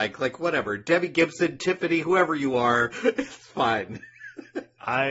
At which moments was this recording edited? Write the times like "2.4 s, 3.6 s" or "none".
none

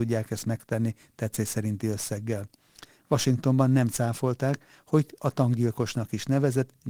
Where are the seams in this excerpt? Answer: 3.0 s

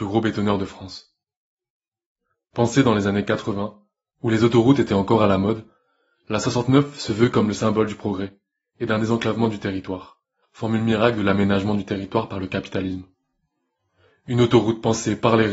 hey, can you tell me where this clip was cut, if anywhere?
10.4 s

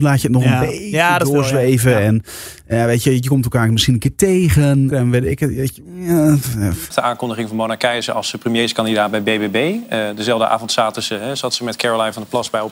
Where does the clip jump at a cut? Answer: 4.9 s, 6.9 s

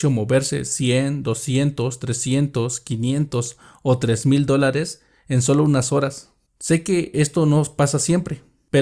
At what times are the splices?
none

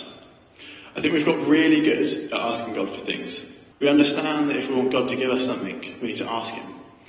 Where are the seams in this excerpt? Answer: 3.7 s

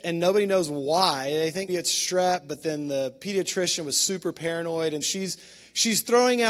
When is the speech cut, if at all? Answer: 1.7 s, 5.0 s

